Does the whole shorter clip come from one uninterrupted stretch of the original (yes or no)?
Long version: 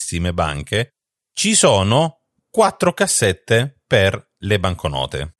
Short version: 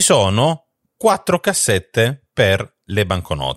yes